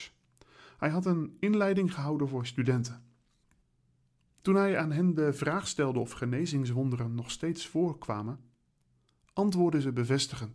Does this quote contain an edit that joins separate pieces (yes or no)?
no